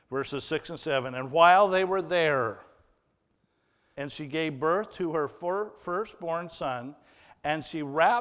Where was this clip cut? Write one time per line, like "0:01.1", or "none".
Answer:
0:03.9